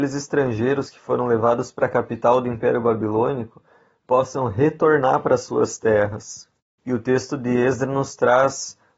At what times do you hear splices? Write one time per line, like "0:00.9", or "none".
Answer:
none